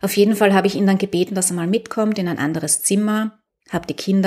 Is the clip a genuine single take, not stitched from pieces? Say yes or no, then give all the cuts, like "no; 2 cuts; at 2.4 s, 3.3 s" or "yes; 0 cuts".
yes; 0 cuts